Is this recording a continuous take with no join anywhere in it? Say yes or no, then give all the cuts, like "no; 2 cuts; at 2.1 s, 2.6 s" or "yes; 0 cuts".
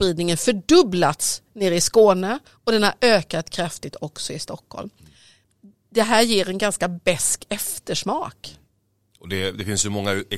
yes; 0 cuts